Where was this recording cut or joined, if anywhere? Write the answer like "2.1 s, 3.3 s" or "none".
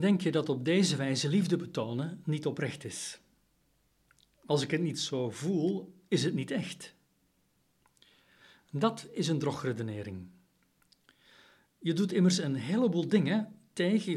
none